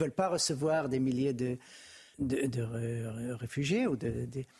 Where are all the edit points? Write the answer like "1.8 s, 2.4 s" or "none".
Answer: 2.1 s